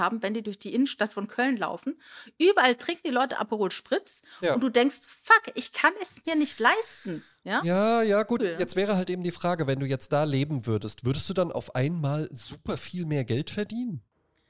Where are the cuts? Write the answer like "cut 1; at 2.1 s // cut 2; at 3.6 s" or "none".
cut 1; at 8.4 s